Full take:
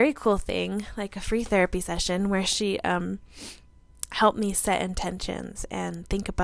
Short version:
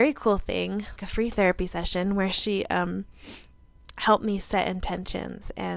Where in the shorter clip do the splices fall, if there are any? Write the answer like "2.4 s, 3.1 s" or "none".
1.0 s